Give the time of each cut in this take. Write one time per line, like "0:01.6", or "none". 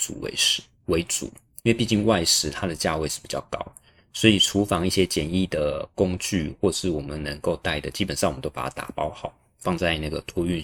none

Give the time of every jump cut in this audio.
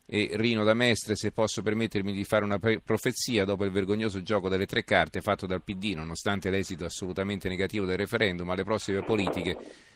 none

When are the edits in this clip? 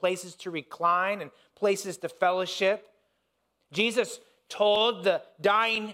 none

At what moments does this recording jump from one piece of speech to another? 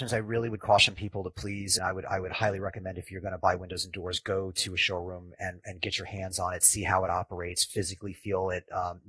0:01.8

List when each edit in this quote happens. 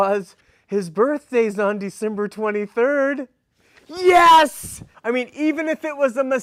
0:04.9

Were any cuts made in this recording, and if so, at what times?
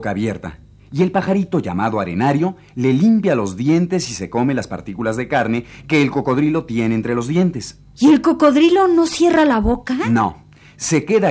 none

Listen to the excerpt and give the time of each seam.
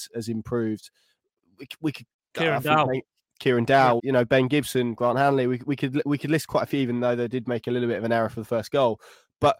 0:04.0

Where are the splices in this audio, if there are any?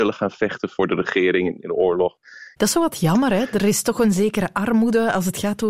0:02.6

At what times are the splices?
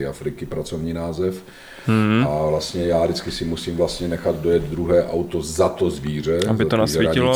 none

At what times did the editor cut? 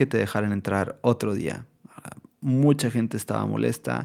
none

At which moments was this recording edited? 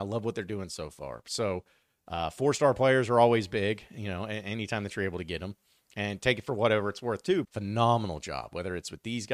0:07.4

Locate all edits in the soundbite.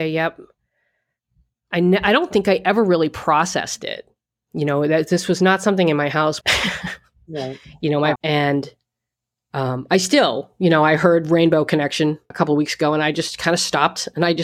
0:06.4
0:08.2
0:12.3

